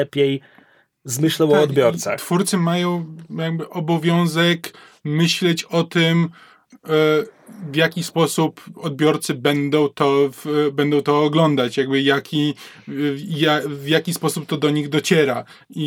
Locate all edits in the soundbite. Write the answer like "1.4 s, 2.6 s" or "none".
none